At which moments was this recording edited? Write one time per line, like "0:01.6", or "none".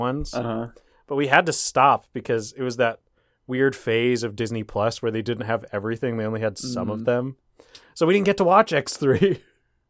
none